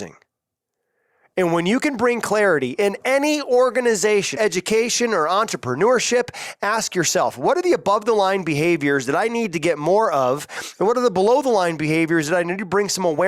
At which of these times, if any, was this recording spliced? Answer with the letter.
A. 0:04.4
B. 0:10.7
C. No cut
A